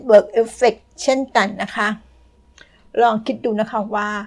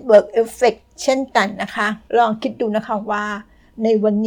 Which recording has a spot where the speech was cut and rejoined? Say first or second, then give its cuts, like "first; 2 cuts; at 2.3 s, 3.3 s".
second; 1 cut; at 2.1 s